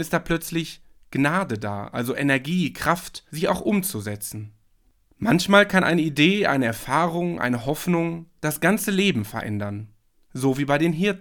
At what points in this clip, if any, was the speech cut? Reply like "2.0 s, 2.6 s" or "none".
3.3 s